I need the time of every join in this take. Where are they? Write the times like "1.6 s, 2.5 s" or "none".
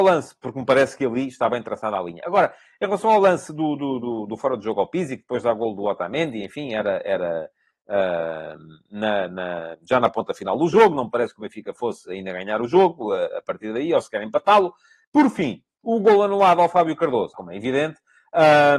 15.0 s, 17.3 s